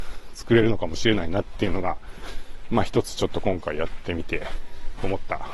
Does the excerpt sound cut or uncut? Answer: uncut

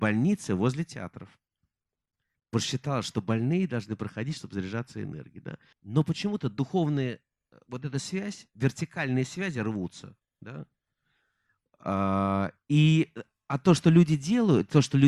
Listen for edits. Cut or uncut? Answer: cut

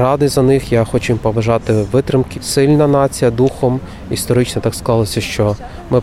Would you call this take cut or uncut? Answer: cut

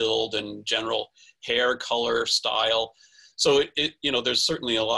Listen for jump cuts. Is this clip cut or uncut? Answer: uncut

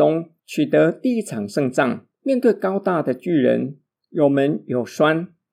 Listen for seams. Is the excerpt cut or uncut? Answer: cut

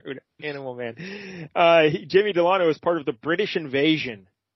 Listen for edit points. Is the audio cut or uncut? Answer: uncut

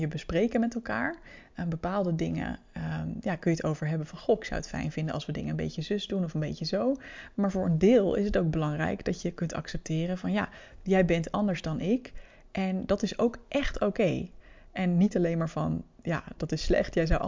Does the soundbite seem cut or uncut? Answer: uncut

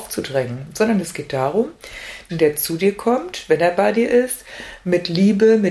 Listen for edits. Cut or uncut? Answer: cut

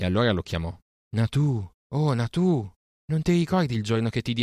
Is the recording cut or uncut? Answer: cut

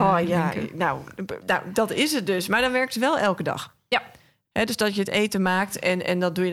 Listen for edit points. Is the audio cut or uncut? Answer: cut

